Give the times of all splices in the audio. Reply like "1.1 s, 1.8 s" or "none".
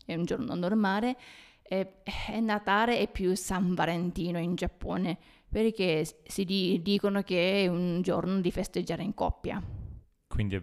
none